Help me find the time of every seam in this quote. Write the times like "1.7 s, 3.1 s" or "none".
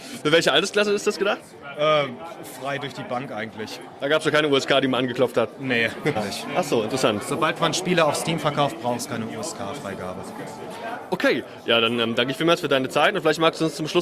6.2 s